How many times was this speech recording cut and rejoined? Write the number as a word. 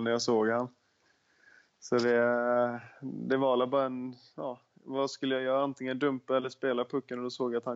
zero